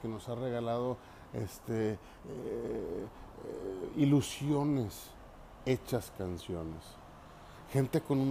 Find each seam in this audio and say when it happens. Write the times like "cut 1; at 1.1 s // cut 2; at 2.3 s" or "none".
none